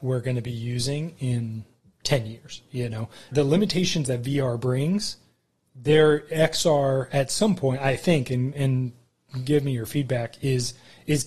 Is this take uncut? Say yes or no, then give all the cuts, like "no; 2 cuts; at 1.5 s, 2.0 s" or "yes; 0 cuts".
no; 1 cut; at 3.3 s